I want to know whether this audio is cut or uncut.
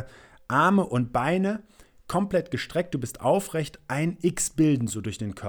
uncut